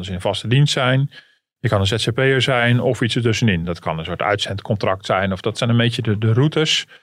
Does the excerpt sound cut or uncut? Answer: uncut